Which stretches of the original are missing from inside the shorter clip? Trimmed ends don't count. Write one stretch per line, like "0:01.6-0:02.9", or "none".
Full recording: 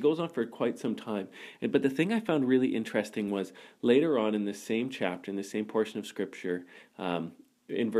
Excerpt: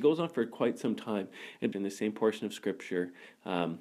0:01.7-0:05.3